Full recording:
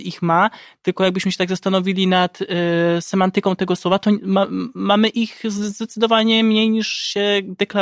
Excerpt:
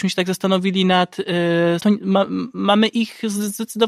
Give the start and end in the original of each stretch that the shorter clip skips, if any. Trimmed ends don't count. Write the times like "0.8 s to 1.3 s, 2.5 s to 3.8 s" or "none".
3.0 s to 4.0 s